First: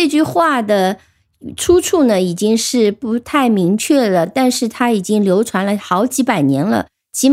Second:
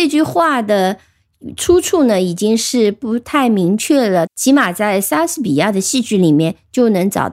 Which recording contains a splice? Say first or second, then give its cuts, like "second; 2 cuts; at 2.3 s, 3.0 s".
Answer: second; 1 cut; at 4.3 s